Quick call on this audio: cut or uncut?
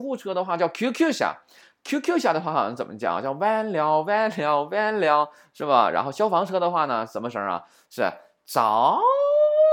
uncut